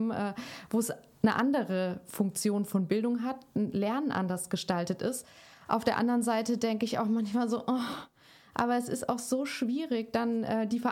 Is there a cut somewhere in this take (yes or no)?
no